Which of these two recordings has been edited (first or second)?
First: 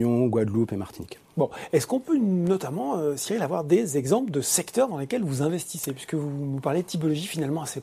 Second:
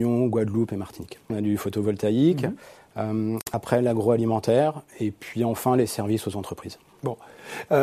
second